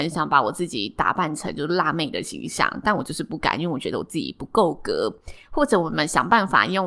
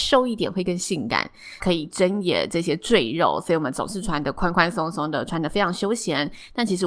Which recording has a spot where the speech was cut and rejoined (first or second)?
second